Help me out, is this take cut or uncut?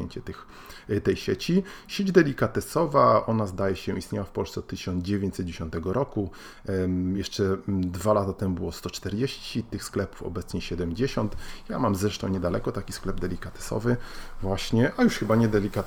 uncut